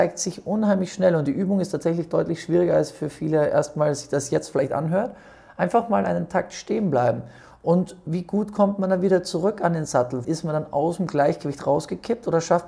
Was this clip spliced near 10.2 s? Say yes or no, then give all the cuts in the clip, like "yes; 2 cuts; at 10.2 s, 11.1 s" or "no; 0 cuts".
yes; 1 cut; at 10.2 s